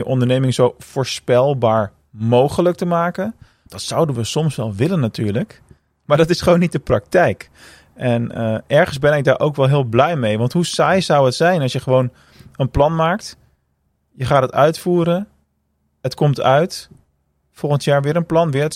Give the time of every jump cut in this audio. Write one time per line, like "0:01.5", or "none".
0:03.7